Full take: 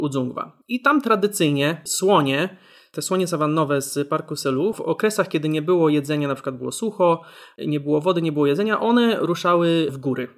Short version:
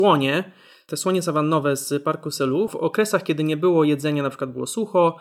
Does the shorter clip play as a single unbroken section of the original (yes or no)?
yes